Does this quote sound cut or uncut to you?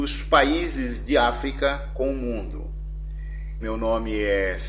cut